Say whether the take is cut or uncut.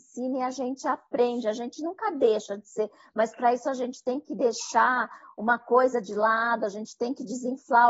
uncut